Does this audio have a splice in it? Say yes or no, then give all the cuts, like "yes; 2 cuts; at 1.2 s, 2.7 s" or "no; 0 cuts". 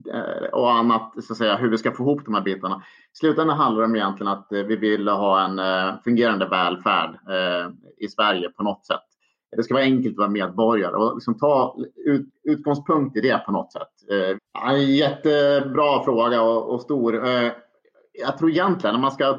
yes; 1 cut; at 14.3 s